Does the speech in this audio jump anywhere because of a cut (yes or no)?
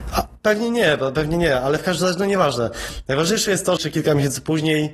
yes